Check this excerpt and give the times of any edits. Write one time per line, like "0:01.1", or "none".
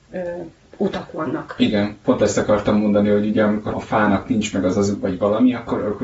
0:03.7
0:05.0